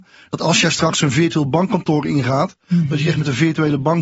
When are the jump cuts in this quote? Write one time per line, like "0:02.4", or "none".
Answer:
none